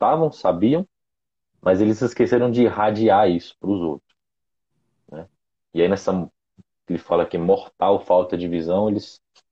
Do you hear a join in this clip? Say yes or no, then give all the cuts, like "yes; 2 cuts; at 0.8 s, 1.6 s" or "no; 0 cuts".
no; 0 cuts